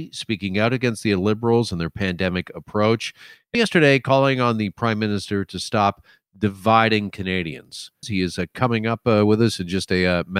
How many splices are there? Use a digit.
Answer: 2